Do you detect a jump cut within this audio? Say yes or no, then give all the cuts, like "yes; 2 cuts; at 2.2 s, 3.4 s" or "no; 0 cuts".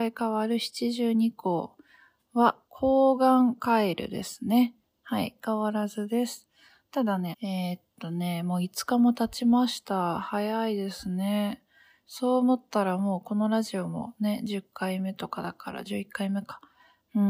yes; 1 cut; at 7.3 s